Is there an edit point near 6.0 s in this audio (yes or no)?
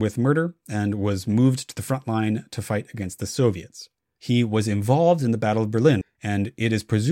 yes